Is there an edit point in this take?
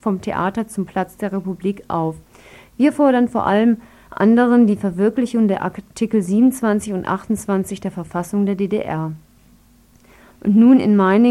yes; 1 cut; at 10.3 s

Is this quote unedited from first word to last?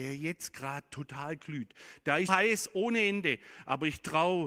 no; 1 cut; at 2.3 s

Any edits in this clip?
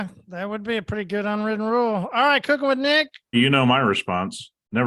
yes; 1 cut; at 3.3 s

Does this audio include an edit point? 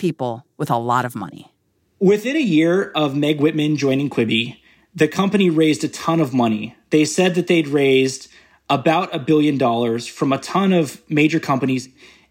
no; 0 cuts

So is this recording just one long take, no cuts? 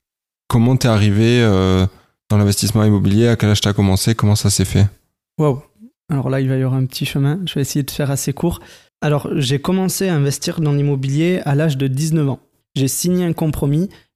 no; 2 cuts; at 8.9 s, 12.6 s

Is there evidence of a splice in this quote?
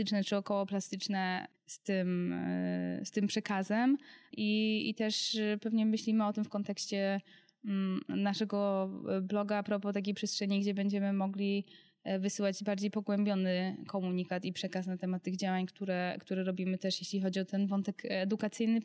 yes; 1 cut; at 1.5 s

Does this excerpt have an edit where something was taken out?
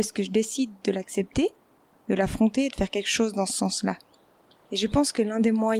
yes; 1 cut; at 4.6 s

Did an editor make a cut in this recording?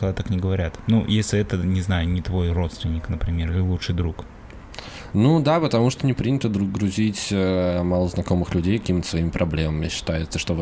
no; 0 cuts

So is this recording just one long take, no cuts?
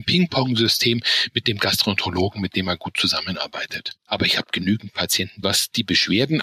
no; 2 cuts; at 4.1 s, 5.4 s

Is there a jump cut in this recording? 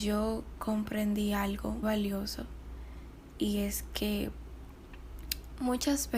yes; 1 cut; at 1.8 s

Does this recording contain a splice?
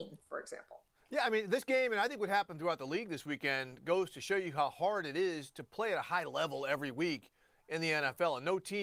no; 0 cuts

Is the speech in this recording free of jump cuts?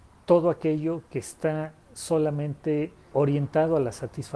no; 1 cut; at 3.1 s

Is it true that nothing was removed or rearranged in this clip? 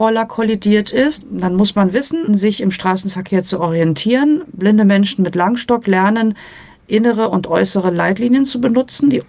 no; 2 cuts; at 1.2 s, 2.3 s

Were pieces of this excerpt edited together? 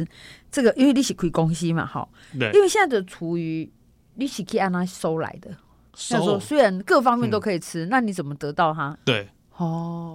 yes; 1 cut; at 9.0 s

